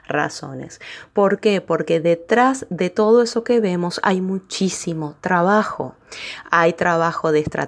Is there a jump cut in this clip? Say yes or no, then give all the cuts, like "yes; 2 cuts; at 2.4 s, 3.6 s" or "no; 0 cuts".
no; 0 cuts